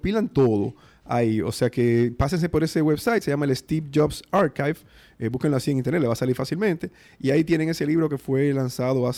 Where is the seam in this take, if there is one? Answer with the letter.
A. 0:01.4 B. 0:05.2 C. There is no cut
C